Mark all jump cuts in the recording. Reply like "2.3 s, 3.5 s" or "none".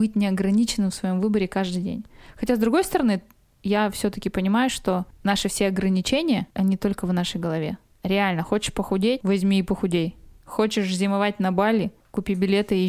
none